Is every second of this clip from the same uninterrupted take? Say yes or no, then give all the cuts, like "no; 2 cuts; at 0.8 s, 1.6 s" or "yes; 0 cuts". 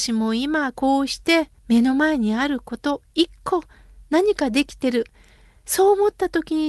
no; 1 cut; at 1.6 s